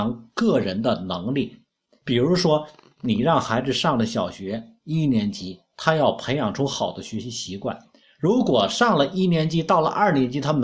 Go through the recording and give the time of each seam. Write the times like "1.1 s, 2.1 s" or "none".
none